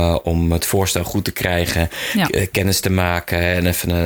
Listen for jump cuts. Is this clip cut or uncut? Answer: uncut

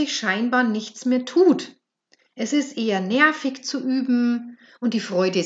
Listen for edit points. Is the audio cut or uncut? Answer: uncut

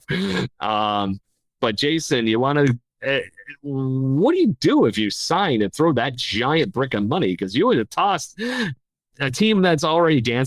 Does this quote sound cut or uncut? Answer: uncut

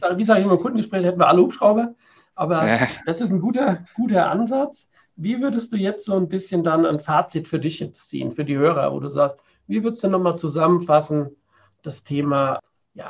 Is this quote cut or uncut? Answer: uncut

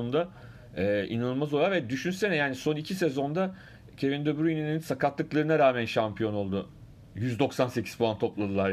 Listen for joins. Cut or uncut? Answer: uncut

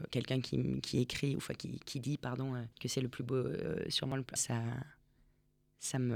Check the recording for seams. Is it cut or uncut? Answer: cut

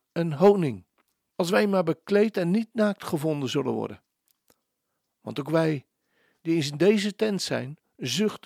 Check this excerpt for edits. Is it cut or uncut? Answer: cut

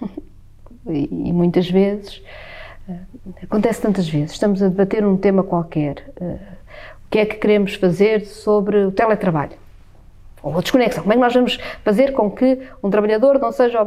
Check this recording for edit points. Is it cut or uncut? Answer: uncut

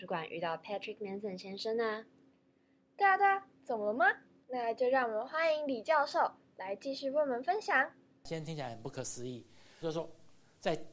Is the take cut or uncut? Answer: cut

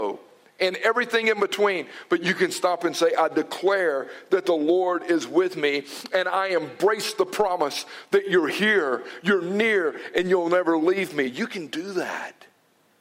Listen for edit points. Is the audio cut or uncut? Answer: uncut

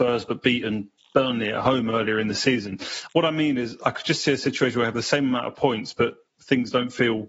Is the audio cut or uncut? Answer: uncut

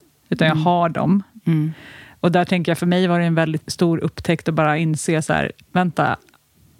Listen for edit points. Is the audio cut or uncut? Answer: cut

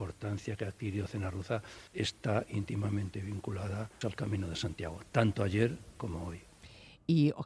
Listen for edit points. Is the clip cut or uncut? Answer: cut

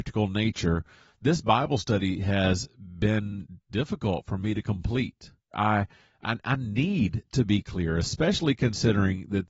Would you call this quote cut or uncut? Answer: cut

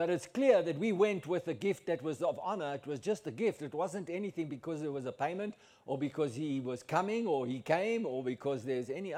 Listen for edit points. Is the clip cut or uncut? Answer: uncut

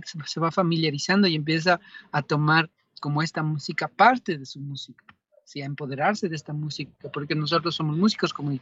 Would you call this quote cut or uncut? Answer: uncut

